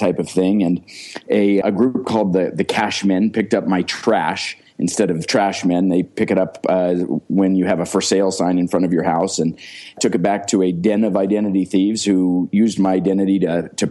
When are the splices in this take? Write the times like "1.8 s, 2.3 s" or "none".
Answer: 1.6 s